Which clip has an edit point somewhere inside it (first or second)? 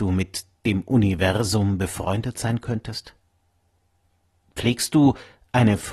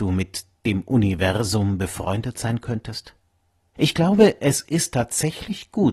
second